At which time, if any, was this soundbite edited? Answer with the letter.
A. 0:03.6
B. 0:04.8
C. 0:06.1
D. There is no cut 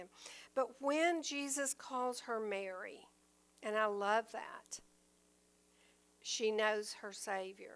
D